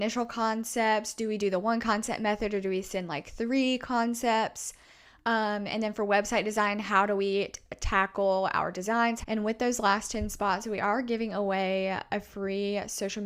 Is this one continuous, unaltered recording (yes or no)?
no